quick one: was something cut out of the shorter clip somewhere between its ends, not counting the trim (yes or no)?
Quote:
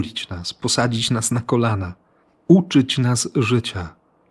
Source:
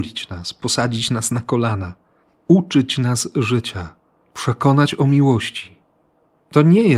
no